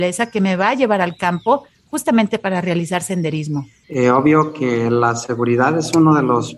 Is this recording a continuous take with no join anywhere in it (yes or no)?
no